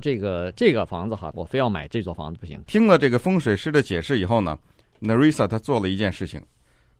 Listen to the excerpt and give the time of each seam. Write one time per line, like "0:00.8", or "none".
0:01.3
0:02.7